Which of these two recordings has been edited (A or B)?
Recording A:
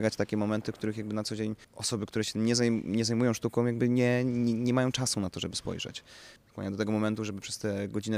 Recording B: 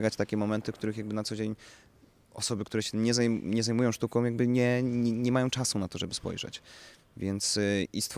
A